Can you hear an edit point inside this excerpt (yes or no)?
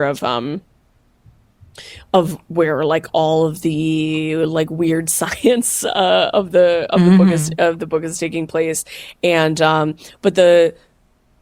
no